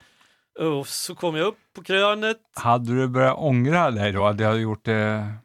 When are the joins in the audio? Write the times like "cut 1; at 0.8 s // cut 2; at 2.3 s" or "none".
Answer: none